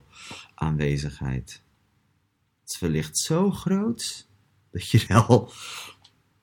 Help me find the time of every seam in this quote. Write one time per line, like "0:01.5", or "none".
0:05.1